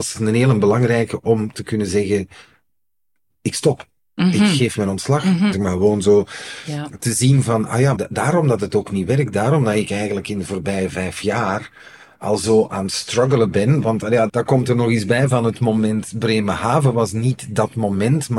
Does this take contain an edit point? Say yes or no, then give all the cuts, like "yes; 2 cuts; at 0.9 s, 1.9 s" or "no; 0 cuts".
yes; 3 cuts; at 5.5 s, 7.9 s, 14.3 s